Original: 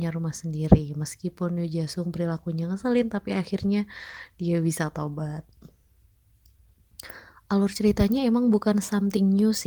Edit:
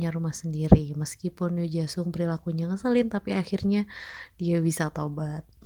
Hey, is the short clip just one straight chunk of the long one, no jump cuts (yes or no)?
yes